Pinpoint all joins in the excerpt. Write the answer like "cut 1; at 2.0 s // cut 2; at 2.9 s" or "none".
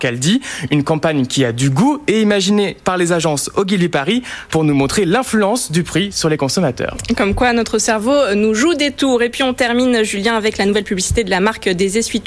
cut 1; at 4.5 s